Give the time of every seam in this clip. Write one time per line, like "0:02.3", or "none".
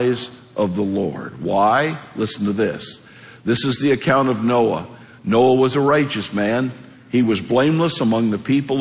none